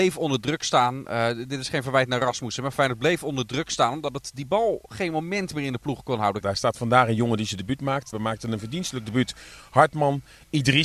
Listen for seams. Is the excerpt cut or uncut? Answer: cut